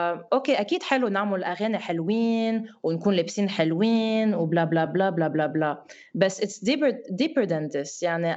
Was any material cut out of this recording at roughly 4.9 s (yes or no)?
no